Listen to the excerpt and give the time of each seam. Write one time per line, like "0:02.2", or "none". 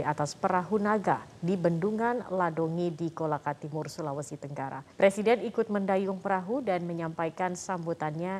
0:04.9